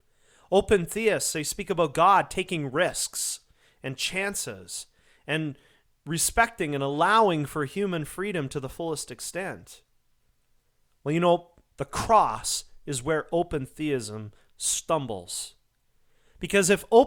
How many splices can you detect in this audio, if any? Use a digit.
1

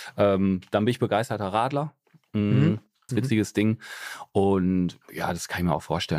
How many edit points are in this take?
1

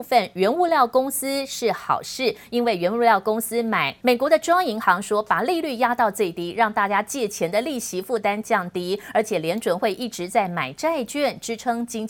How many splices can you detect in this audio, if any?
1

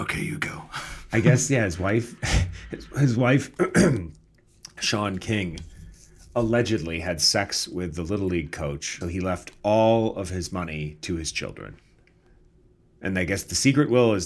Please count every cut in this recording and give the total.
1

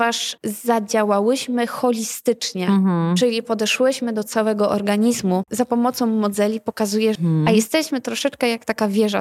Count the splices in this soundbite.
2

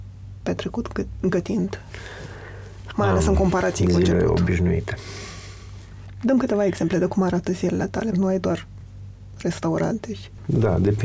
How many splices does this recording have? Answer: 1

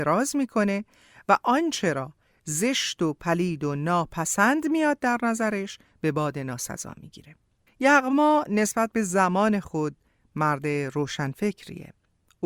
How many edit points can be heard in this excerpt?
1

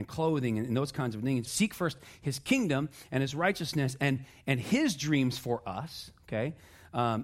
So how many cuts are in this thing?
1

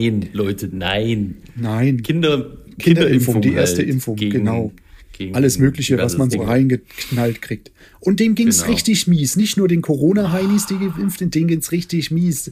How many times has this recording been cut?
1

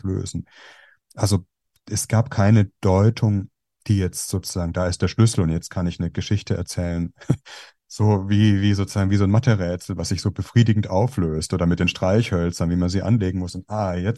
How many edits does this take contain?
0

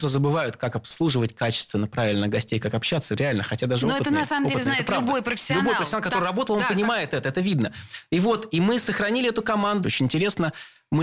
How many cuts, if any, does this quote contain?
1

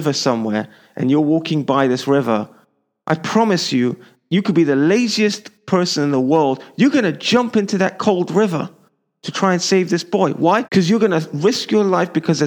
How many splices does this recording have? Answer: 1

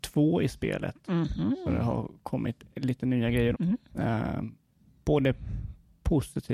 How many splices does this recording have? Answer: 1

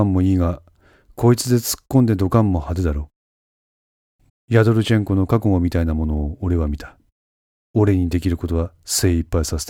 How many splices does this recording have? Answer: 1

